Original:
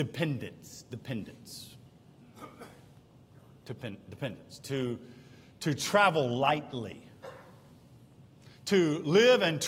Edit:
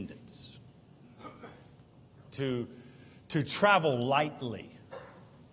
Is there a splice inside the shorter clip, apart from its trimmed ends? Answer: yes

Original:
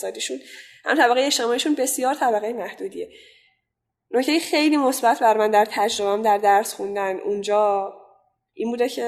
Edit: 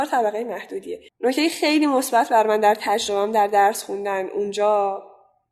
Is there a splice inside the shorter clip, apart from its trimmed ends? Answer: yes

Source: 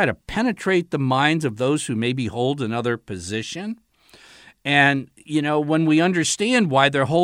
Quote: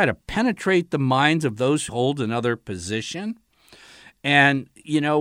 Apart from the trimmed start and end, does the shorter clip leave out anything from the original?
yes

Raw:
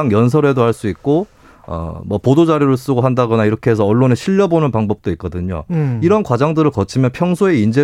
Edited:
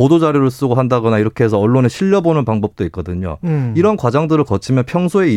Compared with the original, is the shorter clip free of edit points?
yes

